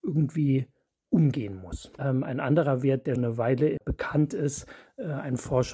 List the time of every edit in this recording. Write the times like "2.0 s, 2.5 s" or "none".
2.0 s, 3.2 s